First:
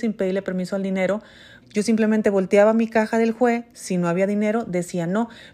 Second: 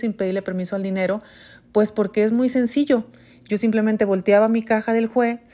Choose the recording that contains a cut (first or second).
first